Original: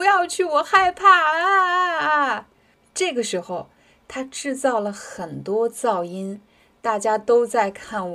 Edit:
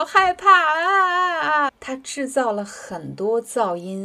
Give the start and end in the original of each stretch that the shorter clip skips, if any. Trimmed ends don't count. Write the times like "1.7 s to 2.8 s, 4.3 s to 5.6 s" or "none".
2.3 s to 4.0 s

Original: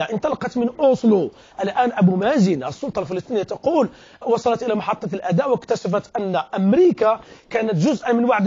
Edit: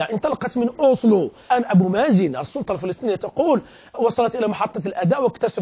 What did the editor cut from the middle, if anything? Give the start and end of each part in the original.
1.5 s to 1.8 s

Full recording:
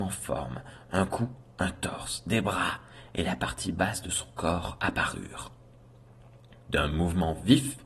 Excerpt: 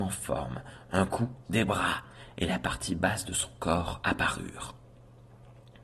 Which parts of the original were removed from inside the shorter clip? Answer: 1.5 s to 2.2 s

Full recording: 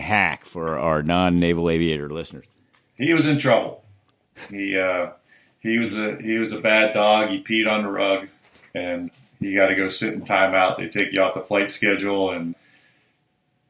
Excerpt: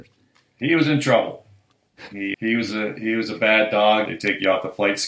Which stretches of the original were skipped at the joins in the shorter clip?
4.7 s to 5.6 s, 7.3 s to 10.8 s

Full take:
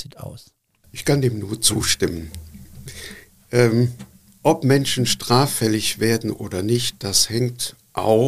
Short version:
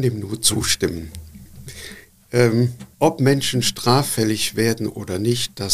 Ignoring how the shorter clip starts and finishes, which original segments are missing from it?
4.1 s to 4.4 s

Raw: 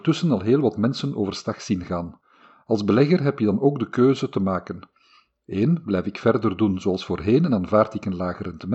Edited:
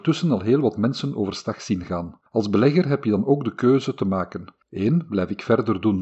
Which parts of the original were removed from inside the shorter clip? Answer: 2.3 s to 2.6 s, 5.0 s to 5.4 s

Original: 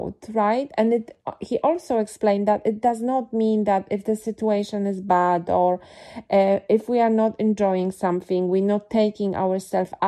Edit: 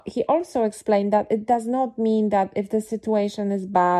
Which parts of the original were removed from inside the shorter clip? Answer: none

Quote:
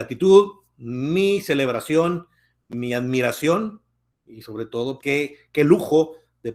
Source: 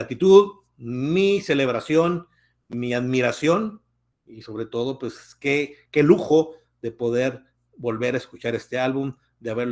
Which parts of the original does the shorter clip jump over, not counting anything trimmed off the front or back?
5.0 s to 5.4 s

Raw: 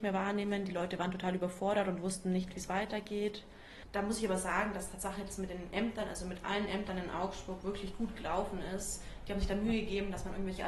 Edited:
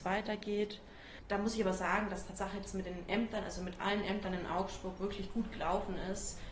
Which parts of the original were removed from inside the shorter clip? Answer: none

